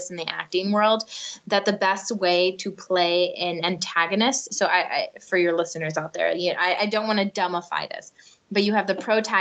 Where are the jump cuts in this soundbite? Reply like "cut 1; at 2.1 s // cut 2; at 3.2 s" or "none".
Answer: none